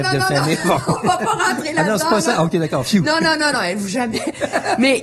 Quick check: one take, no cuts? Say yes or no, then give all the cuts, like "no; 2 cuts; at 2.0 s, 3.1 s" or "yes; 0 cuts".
no; 1 cut; at 3.5 s